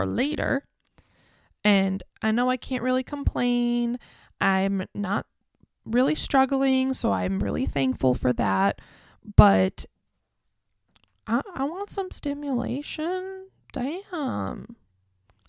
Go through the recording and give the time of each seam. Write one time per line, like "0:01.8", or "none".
none

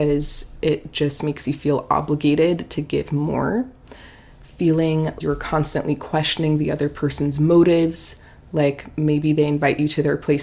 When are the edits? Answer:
0:05.2

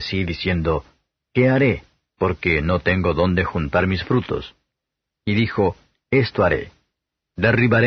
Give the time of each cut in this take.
none

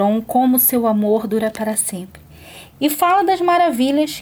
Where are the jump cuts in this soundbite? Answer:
0:02.7

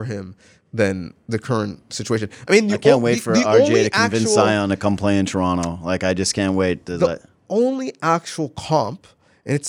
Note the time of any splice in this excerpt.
none

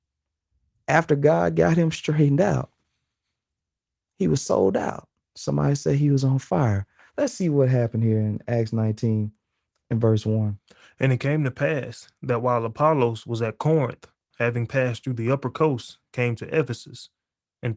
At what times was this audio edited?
0:14.3

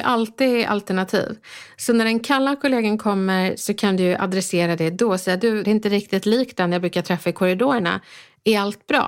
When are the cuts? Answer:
0:05.6

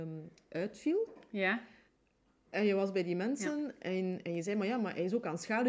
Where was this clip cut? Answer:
none

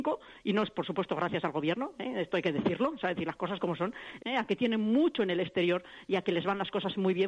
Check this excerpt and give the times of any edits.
0:04.2

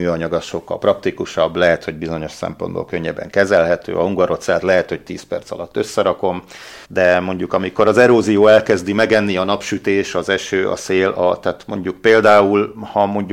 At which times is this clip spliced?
0:06.8

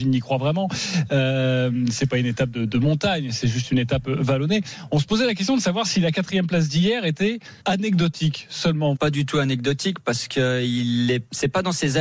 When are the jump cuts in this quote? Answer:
0:07.6
0:09.0

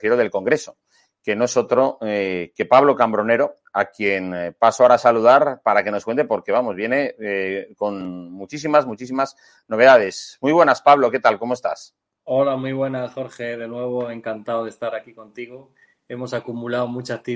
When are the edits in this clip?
none

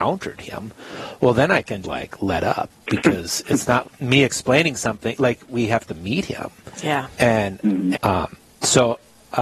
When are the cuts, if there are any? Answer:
0:01.8
0:03.8
0:07.9

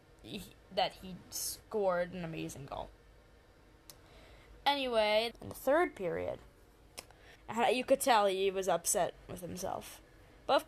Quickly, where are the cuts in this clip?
0:05.3
0:07.4

